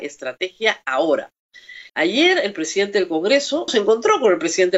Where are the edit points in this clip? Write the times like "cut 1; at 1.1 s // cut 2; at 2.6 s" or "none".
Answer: cut 1; at 1.9 s // cut 2; at 3.7 s